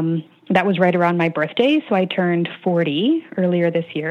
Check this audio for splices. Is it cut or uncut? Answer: uncut